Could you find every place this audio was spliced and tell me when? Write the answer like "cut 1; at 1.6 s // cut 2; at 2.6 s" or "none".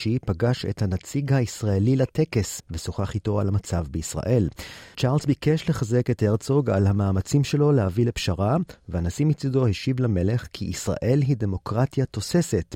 cut 1; at 2.6 s // cut 2; at 4.9 s